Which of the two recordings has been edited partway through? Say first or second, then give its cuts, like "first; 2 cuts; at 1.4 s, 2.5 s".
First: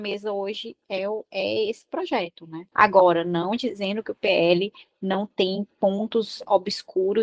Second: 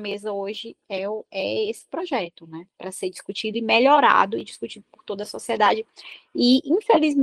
first; 1 cut; at 2.7 s